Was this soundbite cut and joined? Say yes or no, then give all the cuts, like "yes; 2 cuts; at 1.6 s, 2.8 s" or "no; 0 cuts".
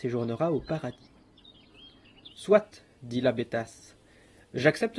no; 0 cuts